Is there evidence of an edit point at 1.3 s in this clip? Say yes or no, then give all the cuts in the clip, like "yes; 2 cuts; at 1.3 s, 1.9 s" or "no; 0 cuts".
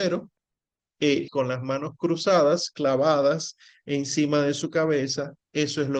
yes; 1 cut; at 1.3 s